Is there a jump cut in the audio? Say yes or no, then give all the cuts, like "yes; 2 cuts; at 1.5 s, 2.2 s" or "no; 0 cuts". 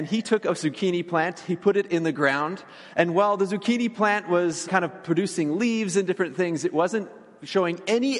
yes; 1 cut; at 4.7 s